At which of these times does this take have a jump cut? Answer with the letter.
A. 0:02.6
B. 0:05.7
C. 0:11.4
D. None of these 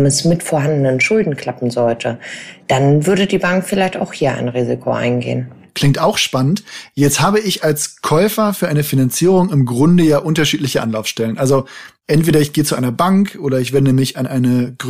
A